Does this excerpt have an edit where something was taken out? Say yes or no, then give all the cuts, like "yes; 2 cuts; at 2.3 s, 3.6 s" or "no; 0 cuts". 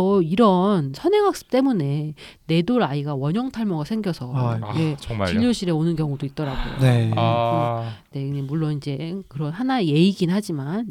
no; 0 cuts